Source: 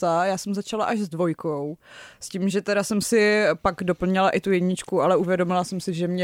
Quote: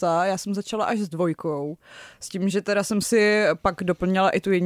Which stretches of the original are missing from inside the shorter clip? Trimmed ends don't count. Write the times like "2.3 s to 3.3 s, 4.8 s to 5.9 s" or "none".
none